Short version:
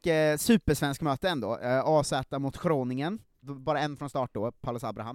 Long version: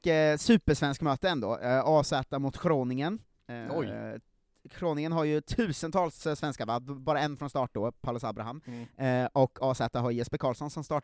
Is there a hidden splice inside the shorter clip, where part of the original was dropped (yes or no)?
yes